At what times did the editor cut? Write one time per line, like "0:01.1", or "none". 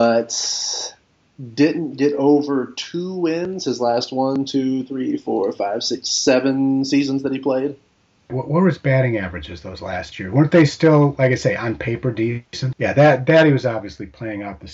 0:08.3
0:12.7

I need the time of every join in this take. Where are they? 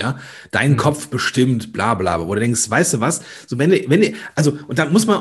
none

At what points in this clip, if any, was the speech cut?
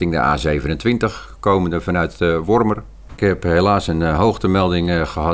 0:03.1

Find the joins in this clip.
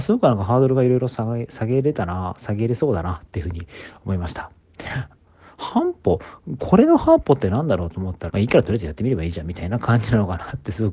0:05.2
0:08.3

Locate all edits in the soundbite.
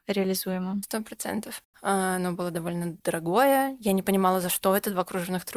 0:01.7

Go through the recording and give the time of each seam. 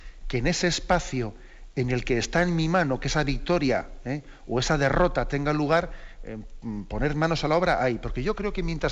none

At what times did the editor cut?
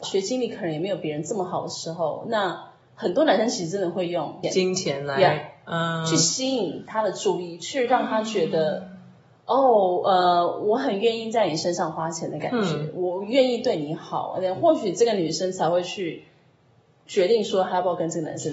none

